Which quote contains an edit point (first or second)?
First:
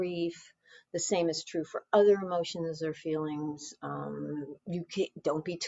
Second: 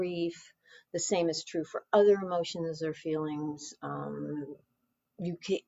first